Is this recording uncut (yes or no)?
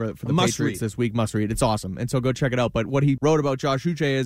no